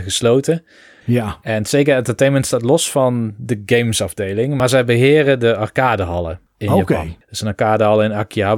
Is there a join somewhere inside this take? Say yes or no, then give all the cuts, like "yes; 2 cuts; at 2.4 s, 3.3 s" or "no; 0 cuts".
yes; 2 cuts; at 1.0 s, 7.2 s